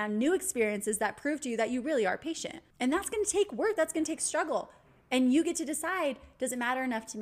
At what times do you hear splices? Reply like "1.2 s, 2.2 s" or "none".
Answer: 2.7 s